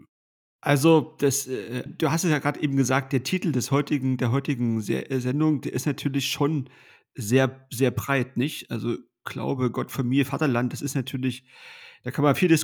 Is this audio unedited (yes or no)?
no